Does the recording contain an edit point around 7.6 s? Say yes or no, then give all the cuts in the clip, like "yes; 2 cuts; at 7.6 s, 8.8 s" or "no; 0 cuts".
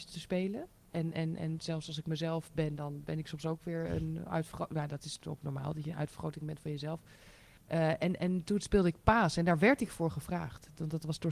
yes; 1 cut; at 7.6 s